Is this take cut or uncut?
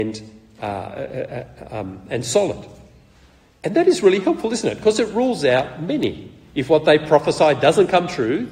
uncut